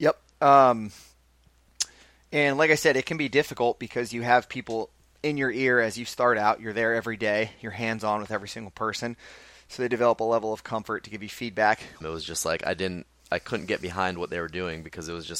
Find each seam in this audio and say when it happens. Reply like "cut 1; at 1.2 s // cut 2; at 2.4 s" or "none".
cut 1; at 12.0 s